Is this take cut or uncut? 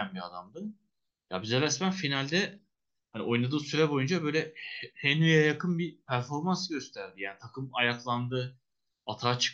uncut